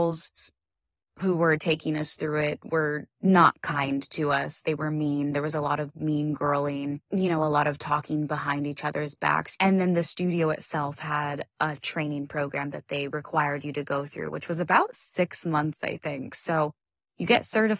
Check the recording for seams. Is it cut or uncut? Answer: cut